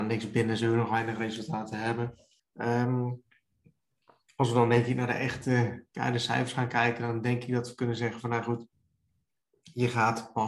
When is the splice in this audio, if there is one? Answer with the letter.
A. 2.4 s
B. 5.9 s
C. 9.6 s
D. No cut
A